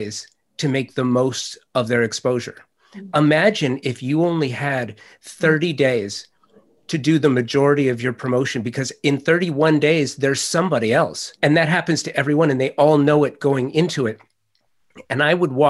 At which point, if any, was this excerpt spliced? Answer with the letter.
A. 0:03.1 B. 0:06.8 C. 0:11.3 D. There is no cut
C